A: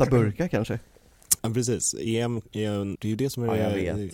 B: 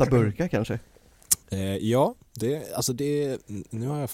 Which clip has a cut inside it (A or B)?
A